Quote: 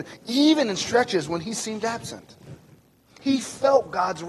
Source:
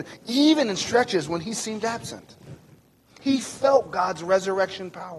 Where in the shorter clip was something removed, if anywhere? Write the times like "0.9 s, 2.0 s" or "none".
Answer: none